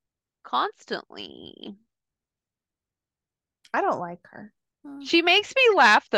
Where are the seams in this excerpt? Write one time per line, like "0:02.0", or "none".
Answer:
0:04.7